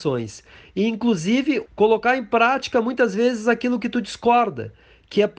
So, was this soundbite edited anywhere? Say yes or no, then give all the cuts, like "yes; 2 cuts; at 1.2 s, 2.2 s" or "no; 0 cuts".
yes; 1 cut; at 1.7 s